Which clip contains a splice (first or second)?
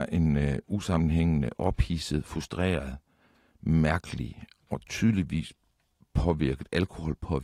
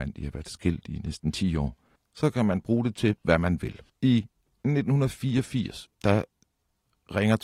second